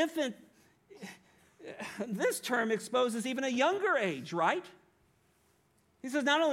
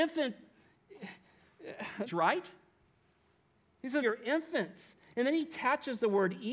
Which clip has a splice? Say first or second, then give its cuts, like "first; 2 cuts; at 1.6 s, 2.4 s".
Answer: second; 2 cuts; at 2.1 s, 4.0 s